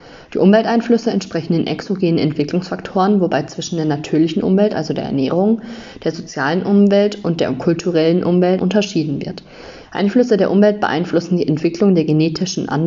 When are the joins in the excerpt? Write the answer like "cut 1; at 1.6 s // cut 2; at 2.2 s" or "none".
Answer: cut 1; at 8.6 s